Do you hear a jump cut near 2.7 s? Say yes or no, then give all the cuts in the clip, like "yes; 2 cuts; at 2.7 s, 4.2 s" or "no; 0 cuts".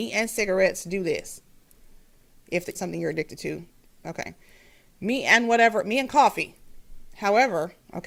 yes; 1 cut; at 2.7 s